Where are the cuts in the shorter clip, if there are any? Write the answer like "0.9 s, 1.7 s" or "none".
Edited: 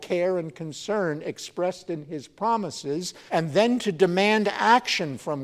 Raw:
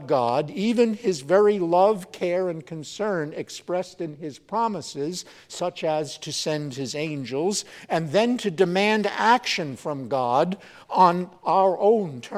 3.3 s